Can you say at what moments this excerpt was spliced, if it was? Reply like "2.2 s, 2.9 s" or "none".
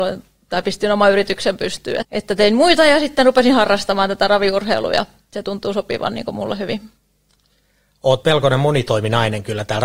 2.0 s

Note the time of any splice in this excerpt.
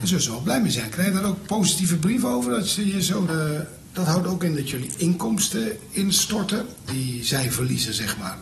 3.3 s, 6.9 s

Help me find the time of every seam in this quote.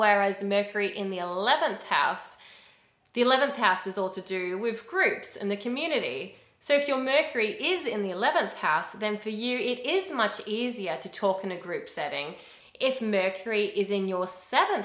12.6 s

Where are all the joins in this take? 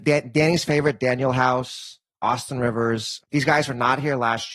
3.2 s

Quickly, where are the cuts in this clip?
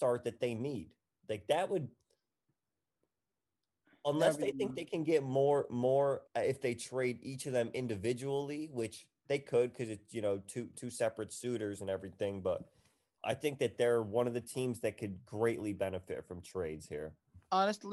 6.3 s

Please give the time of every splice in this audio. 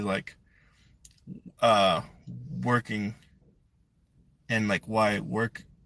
none

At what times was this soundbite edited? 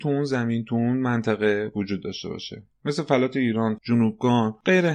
3.8 s

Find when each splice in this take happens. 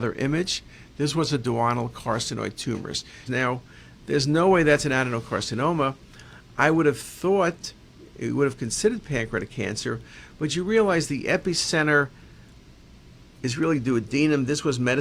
3.3 s

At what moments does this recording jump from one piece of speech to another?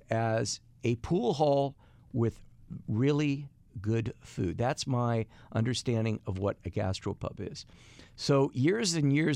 none

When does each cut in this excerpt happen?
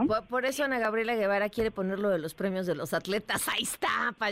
none

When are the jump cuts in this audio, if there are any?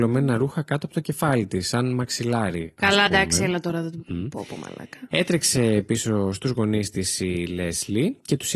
none

